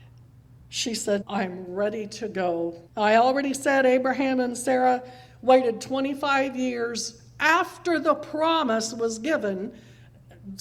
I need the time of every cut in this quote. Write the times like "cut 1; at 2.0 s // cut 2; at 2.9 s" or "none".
cut 1; at 1.2 s // cut 2; at 2.9 s